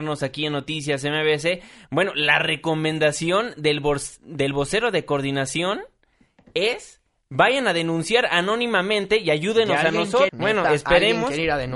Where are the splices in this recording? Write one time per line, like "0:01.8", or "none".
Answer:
0:10.3